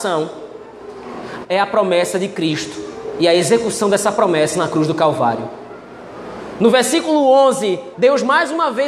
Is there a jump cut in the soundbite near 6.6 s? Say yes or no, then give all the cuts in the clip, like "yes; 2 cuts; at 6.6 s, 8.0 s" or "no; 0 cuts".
no; 2 cuts; at 1.4 s, 7.9 s